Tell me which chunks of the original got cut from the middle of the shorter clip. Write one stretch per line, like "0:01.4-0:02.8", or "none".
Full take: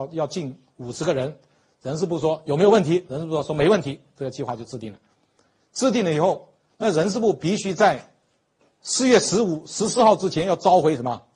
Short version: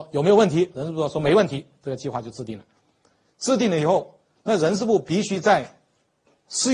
none